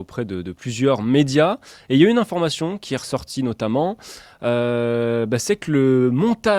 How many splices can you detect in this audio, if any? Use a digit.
0